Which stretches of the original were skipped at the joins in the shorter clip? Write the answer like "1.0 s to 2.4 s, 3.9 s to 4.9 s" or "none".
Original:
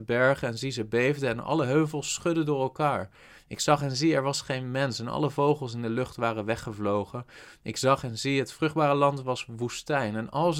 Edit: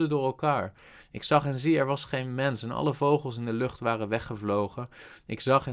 none